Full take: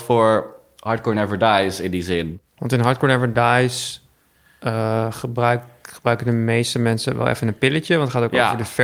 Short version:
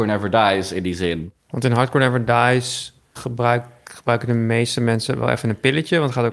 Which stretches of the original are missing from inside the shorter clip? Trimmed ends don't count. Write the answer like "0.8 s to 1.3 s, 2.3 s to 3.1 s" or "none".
4.2 s to 5.1 s